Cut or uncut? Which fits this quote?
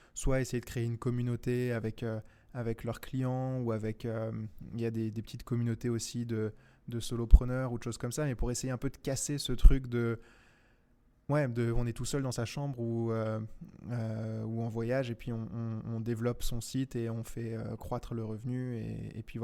uncut